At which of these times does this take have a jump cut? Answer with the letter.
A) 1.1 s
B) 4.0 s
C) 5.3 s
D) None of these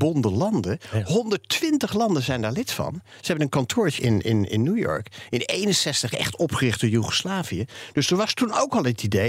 B